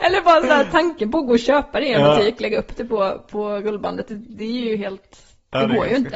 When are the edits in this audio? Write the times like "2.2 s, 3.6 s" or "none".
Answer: none